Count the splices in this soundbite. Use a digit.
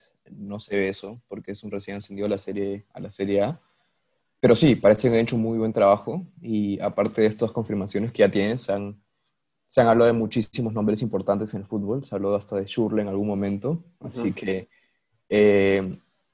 0